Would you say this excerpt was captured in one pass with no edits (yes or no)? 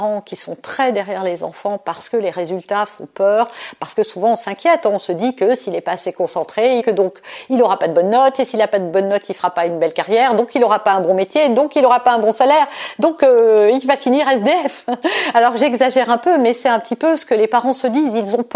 no